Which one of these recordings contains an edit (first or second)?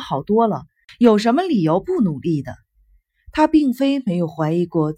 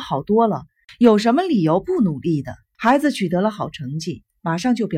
second